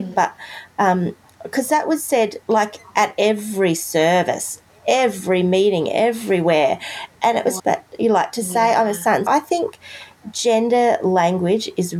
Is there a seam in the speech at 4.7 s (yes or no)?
no